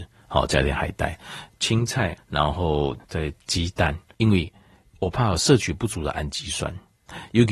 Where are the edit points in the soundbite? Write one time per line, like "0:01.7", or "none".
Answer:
0:02.2
0:04.1